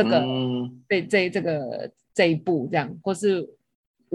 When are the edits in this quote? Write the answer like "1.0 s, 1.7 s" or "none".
none